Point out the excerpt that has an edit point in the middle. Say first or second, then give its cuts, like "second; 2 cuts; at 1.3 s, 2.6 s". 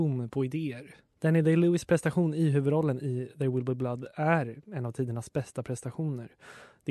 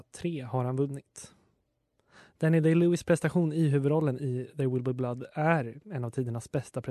first; 1 cut; at 1.1 s